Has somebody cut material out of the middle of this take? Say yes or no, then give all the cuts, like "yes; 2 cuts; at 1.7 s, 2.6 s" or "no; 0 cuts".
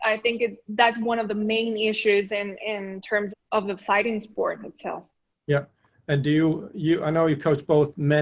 yes; 1 cut; at 3.3 s